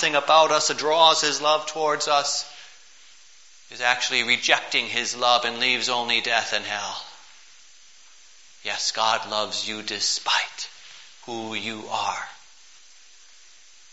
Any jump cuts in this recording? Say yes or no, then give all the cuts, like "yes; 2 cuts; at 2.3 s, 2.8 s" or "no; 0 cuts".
no; 0 cuts